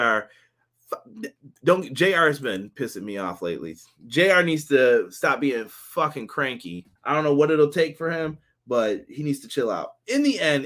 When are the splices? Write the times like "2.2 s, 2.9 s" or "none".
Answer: 1.6 s, 7.0 s